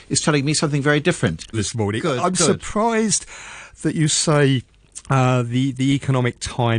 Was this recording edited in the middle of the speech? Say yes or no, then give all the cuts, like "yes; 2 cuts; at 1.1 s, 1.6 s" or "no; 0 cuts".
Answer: yes; 1 cut; at 1.5 s